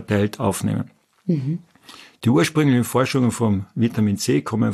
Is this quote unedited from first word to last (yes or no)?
yes